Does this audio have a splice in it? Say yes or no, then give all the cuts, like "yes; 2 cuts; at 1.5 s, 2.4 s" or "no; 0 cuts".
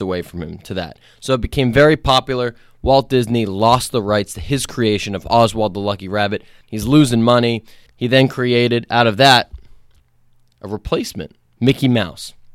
yes; 2 cuts; at 6.6 s, 7.9 s